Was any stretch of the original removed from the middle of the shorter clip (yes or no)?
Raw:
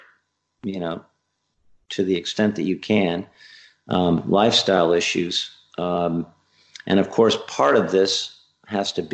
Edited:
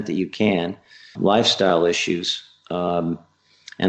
yes